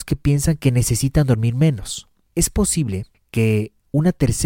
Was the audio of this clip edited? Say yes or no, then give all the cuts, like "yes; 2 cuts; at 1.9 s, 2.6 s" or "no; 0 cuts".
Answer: no; 0 cuts